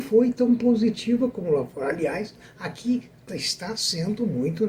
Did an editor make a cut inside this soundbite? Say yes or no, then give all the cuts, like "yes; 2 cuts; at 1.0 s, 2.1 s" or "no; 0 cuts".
no; 0 cuts